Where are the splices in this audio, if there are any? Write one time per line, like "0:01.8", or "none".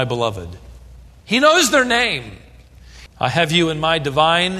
0:01.1
0:03.1